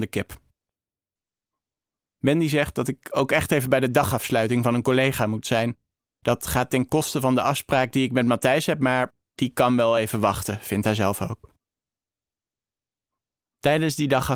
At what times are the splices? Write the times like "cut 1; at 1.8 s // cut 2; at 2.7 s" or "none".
none